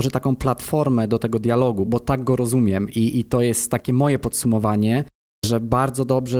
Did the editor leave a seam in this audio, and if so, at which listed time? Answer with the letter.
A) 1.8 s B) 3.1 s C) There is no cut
A